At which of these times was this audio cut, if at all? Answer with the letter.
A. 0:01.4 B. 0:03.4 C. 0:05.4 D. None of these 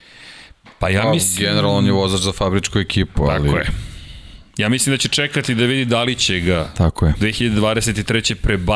D